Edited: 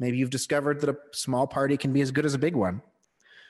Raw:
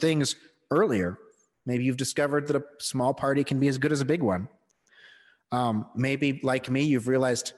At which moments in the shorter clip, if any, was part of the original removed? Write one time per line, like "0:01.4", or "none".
none